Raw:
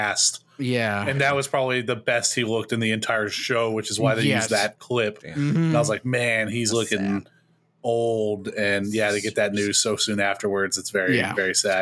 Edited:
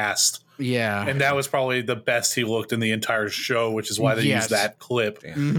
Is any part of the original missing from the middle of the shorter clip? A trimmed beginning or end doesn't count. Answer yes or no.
no